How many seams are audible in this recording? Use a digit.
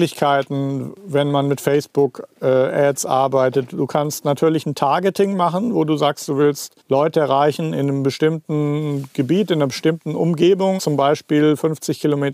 2